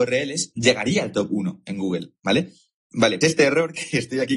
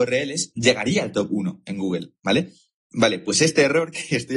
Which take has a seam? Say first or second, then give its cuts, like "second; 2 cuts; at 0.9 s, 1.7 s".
first; 1 cut; at 3.2 s